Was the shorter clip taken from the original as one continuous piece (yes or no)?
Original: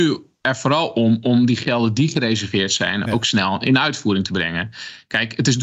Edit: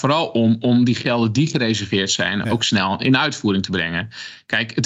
yes